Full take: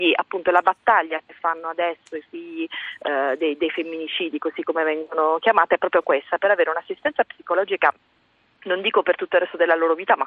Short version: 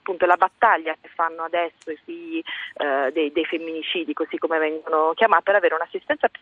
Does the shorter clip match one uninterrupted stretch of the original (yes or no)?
no